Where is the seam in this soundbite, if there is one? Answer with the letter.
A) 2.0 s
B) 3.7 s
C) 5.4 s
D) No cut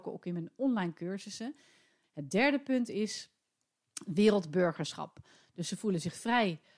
A